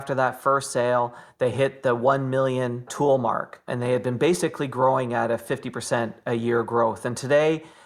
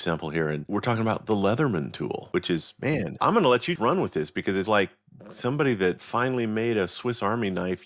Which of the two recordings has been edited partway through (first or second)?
second